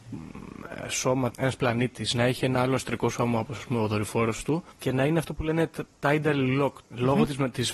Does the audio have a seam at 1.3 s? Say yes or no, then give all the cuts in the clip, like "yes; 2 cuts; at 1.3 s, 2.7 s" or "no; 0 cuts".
yes; 1 cut; at 1.3 s